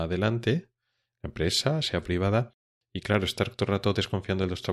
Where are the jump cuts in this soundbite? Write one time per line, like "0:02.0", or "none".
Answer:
0:01.8